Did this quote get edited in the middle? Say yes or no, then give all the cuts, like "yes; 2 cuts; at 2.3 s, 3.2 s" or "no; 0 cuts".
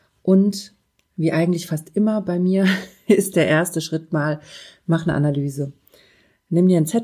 no; 0 cuts